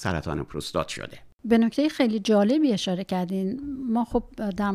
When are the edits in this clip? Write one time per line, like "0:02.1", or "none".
0:01.3